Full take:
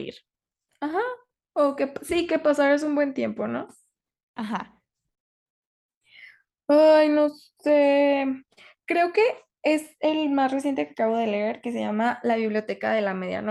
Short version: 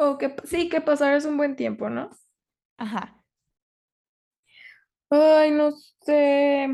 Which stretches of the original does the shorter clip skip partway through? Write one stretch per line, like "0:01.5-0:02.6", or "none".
none